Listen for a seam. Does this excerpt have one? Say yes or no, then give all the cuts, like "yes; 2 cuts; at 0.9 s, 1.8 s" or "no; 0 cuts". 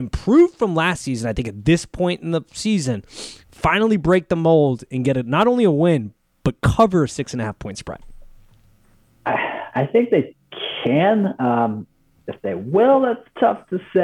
yes; 1 cut; at 3.4 s